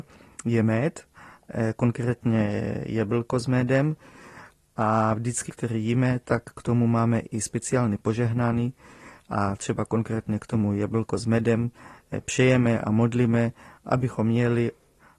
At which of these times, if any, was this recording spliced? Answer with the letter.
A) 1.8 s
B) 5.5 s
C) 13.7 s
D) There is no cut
B